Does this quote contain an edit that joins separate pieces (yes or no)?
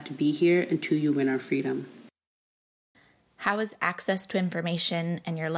no